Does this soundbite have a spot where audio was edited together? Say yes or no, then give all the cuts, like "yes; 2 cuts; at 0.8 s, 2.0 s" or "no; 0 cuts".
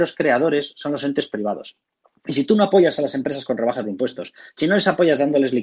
no; 0 cuts